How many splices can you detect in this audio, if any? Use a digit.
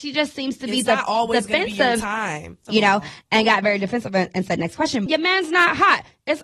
2